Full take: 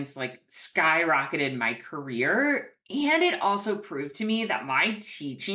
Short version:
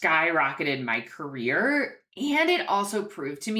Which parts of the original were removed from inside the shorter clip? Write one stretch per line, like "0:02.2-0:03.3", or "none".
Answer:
none